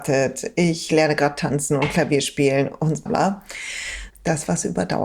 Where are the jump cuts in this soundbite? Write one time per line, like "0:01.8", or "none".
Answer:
0:03.1
0:04.1